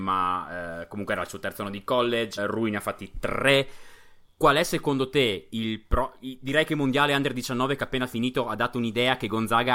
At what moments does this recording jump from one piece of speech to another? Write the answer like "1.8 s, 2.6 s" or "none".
2.4 s